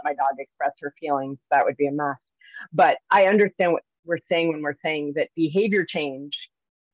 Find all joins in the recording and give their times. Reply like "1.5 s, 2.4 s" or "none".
none